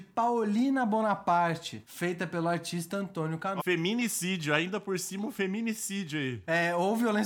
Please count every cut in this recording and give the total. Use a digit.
1